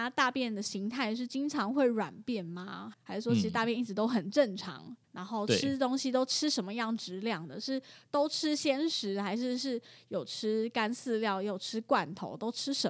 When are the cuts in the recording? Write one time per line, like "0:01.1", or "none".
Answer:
0:02.9
0:05.0